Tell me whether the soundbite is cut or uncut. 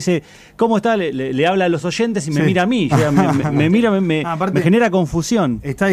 cut